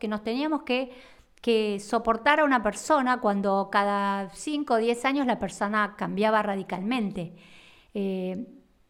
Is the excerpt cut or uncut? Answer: cut